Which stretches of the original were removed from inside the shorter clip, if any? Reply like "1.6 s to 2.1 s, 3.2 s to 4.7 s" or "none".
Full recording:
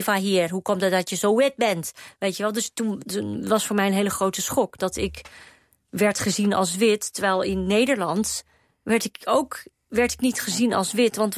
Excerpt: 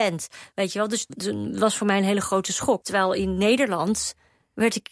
2.7 s to 3.0 s, 4.7 s to 7.1 s

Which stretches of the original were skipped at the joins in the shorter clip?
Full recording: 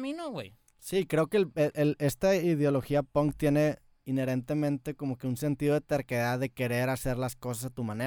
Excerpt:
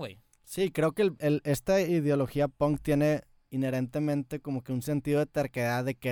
1.5 s to 1.7 s

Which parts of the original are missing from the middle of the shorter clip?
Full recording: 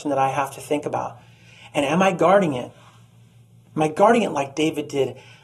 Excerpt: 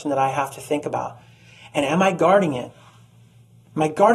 none

